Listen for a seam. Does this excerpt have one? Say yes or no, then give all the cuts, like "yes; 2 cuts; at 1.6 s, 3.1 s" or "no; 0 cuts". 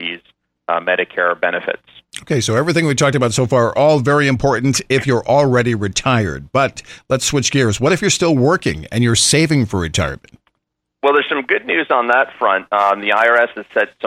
no; 0 cuts